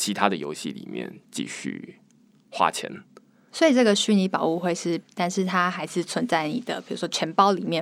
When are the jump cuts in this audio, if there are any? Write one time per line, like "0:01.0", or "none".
0:03.5
0:05.0